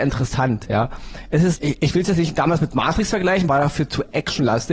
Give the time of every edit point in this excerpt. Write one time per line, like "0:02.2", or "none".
0:01.5
0:03.5